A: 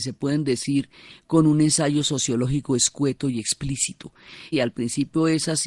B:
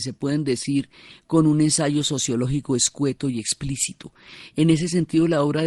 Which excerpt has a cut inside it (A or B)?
A